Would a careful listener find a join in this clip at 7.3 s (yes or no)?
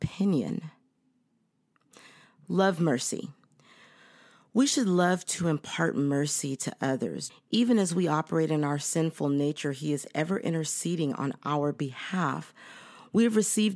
yes